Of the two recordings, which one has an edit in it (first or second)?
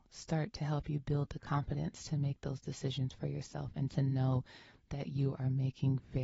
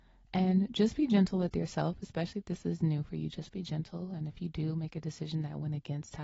first